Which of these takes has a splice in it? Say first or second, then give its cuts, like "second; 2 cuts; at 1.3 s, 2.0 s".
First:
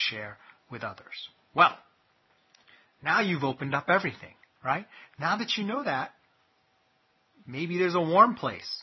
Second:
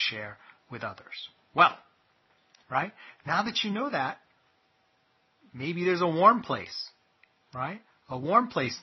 second; 1 cut; at 2.6 s